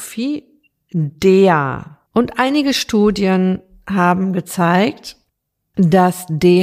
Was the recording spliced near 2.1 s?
yes; 1 cut; at 2.1 s

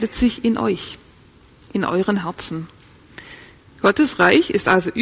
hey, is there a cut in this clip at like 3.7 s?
yes; 1 cut; at 3.7 s

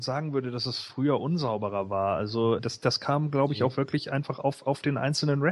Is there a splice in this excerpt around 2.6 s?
yes; 1 cut; at 2.6 s

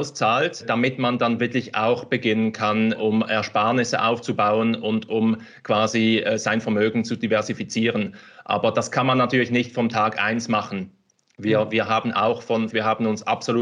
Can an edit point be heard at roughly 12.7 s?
yes; 1 cut; at 12.7 s

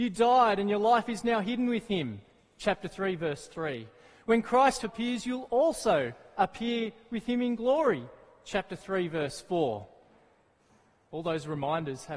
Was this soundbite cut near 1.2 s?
no; 1 cut; at 4.8 s

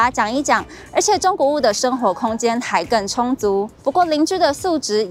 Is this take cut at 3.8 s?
yes; 1 cut; at 3.8 s

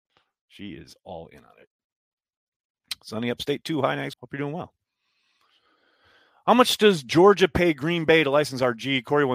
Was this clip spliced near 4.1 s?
yes; 1 cut; at 4.1 s

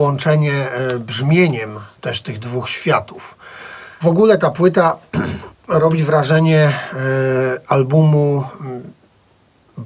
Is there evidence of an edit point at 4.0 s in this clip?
yes; 1 cut; at 4.0 s

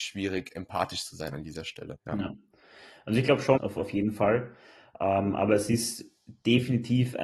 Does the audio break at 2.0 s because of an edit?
yes; 2 cuts; at 2.0 s, 3.6 s

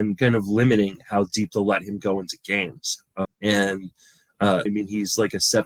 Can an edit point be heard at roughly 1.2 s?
no; 2 cuts; at 3.2 s, 4.7 s

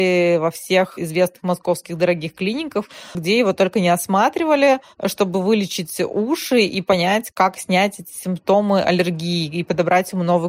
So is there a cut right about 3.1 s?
yes; 1 cut; at 3.1 s

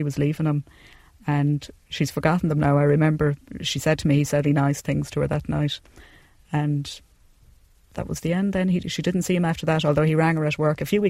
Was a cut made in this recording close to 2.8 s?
no; 2 cuts; at 4.4 s, 8.8 s

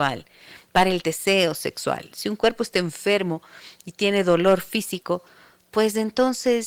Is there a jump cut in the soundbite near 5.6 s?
no; 0 cuts

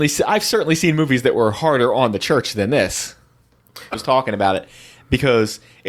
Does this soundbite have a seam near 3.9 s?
yes; 1 cut; at 3.9 s

